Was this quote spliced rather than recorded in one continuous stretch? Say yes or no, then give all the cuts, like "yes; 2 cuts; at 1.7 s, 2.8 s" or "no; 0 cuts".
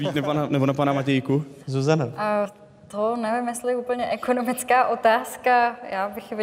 yes; 1 cut; at 1.6 s